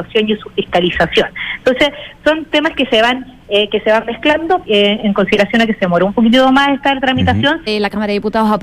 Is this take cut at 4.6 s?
yes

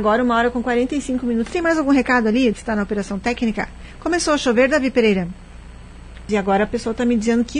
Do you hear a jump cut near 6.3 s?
yes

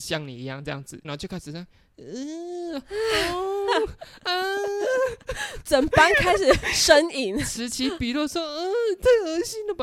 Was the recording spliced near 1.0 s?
yes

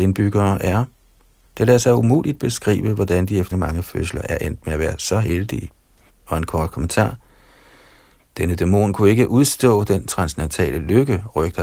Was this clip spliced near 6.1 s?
yes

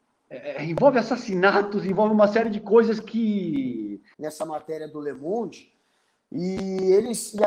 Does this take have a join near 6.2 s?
no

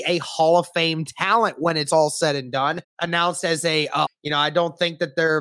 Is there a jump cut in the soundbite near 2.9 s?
yes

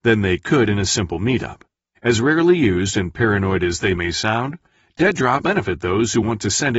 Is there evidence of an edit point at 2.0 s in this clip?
yes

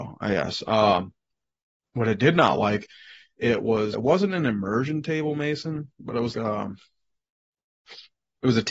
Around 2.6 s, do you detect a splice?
no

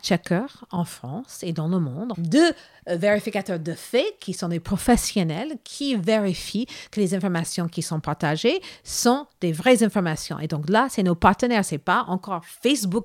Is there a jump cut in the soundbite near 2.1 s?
yes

